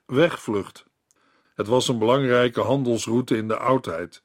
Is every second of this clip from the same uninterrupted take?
no; 1 cut; at 1.4 s

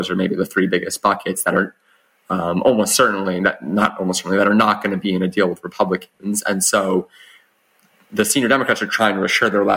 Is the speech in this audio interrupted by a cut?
no; 0 cuts

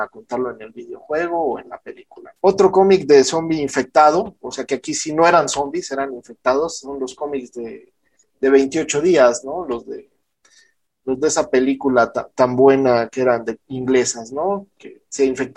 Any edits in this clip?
yes; 1 cut; at 2.4 s

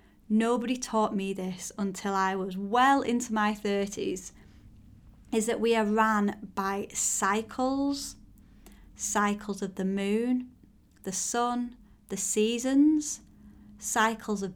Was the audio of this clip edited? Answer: no; 0 cuts

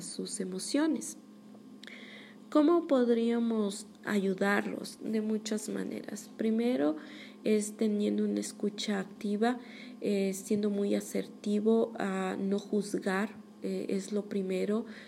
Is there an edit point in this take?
no; 0 cuts

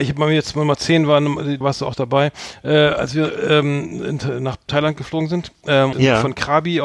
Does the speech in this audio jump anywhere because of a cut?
yes; 2 cuts; at 1.6 s, 5.9 s

